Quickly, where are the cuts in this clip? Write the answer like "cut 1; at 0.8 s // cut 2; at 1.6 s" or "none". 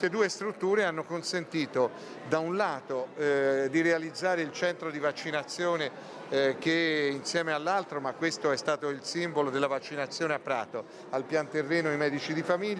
none